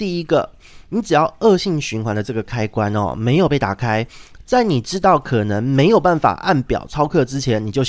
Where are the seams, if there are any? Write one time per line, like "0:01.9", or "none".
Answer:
none